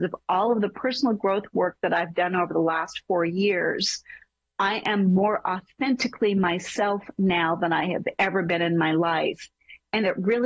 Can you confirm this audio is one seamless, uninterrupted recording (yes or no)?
yes